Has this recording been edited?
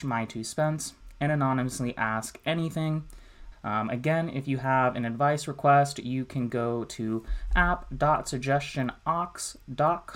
yes; 1 cut; at 3.5 s

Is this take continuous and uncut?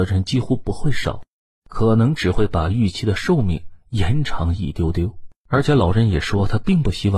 no; 1 cut; at 5.4 s

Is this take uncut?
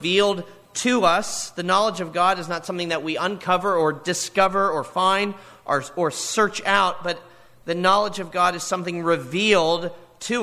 yes; 0 cuts

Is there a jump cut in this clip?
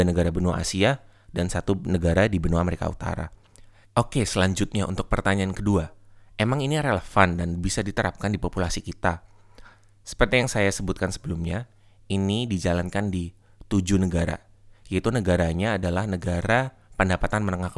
yes; 1 cut; at 3.8 s

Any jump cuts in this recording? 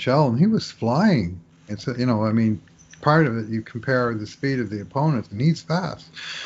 yes; 2 cuts; at 1.7 s, 5.3 s

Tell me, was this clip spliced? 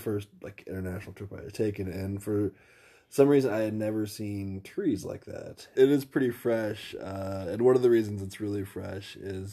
yes; 1 cut; at 5.7 s

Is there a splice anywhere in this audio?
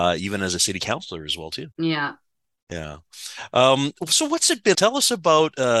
yes; 2 cuts; at 1.7 s, 4.7 s

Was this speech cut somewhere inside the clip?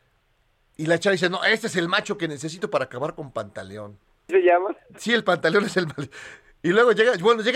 yes; 1 cut; at 4.3 s

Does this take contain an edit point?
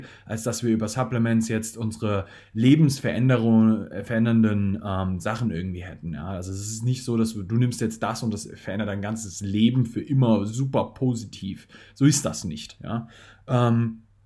no; 0 cuts

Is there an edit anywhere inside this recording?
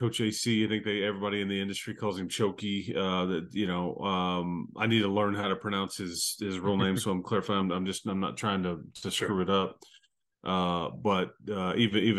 no; 0 cuts

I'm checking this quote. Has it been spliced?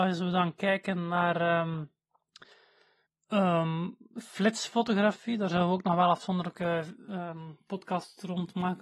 no; 0 cuts

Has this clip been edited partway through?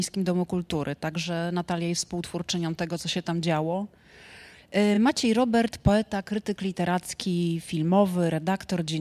no; 0 cuts

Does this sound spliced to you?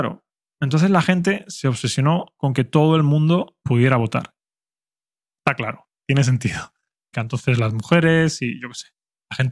yes; 1 cut; at 7.1 s

